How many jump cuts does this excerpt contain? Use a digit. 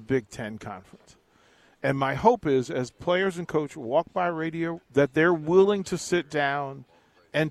1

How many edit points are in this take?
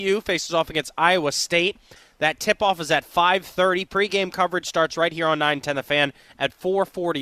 0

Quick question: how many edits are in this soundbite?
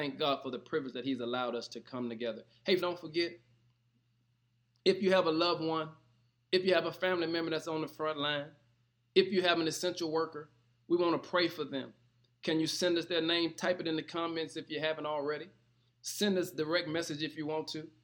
1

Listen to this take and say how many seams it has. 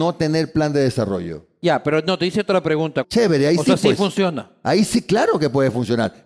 1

